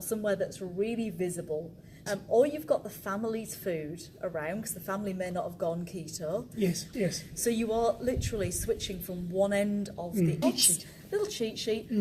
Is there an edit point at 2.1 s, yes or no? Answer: yes